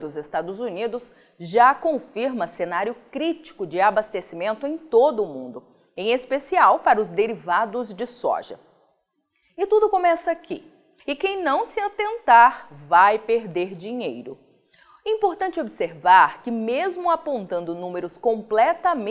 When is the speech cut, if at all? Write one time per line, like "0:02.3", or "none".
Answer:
0:11.0